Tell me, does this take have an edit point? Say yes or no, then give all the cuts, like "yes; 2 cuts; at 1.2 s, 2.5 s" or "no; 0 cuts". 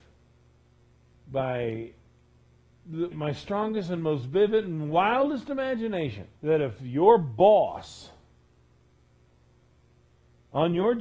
yes; 2 cuts; at 3.1 s, 6.4 s